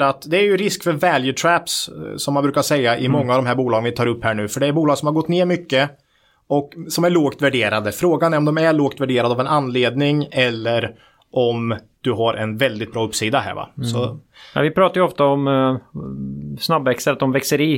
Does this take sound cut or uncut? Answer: uncut